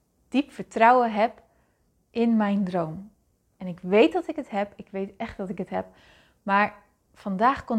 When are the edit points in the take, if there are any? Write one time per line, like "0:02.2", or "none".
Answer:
none